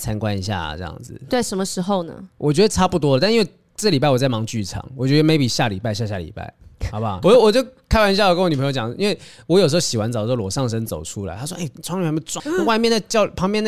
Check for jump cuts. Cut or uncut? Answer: cut